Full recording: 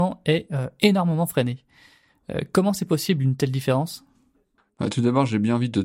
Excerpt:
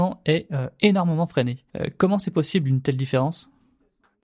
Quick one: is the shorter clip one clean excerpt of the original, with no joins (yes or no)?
no